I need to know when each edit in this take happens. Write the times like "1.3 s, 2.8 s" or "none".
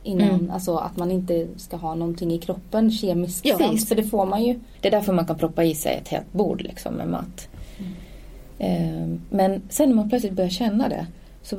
3.6 s, 4.7 s

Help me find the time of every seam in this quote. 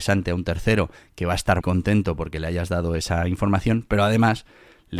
1.6 s

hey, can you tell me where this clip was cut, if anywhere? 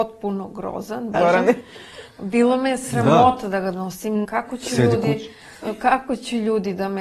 1.1 s, 4.2 s

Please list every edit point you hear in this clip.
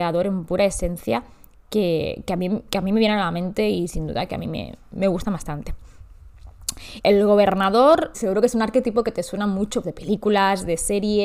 7.0 s, 8.1 s, 9.8 s

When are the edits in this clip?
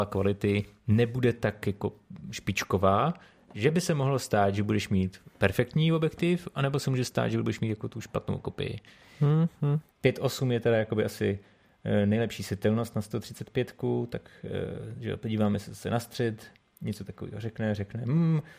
9.9 s

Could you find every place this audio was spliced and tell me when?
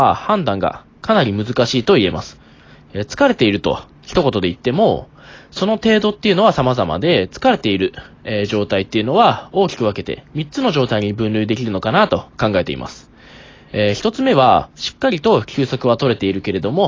none

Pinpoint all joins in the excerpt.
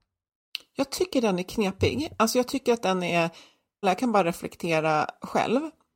3.8 s

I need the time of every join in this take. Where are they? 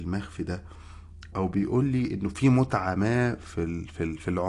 1.3 s

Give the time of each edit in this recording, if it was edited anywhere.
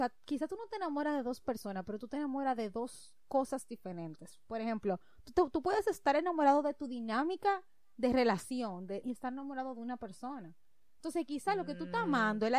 9.0 s

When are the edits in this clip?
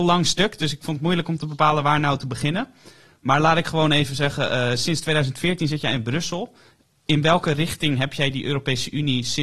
none

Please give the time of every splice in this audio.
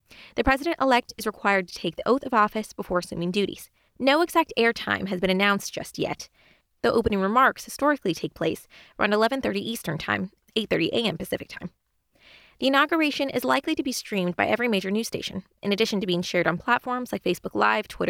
3.9 s

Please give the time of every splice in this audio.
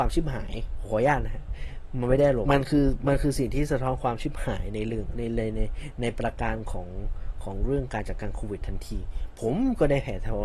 2.5 s

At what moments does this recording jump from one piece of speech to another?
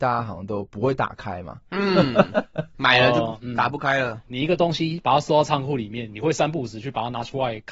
4.3 s

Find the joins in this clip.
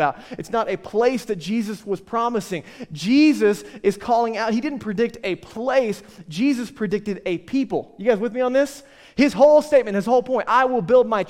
none

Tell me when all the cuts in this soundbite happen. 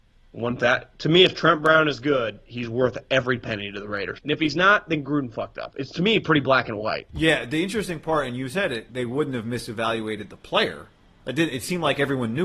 4.2 s, 8.9 s

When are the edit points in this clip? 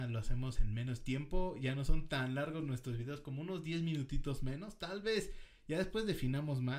none

